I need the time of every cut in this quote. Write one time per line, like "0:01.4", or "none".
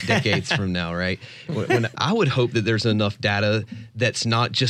0:01.9

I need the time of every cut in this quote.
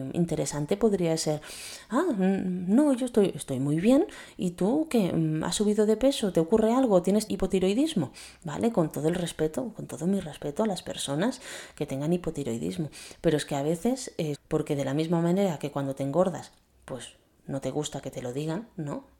0:07.3
0:14.3

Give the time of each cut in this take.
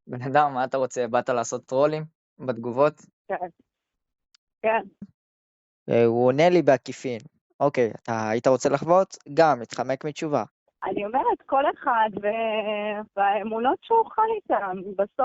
0:05.0
0:10.7
0:13.1

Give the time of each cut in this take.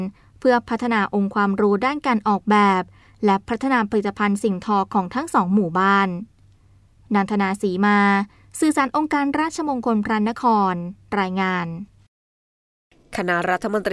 none

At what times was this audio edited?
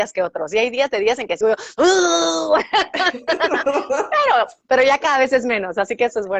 0:01.4

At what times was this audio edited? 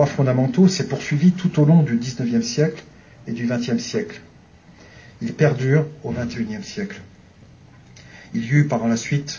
none

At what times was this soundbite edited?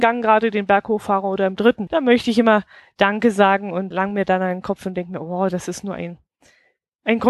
0:01.9
0:03.9

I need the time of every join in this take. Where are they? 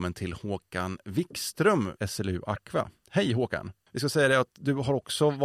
0:02.0
0:03.9

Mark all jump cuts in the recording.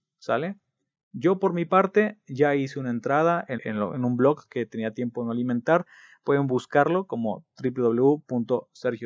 0:03.6

